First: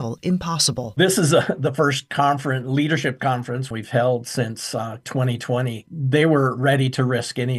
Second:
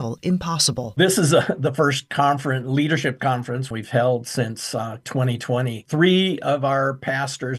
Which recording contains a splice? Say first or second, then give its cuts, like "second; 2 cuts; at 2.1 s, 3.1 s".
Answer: second; 1 cut; at 5.8 s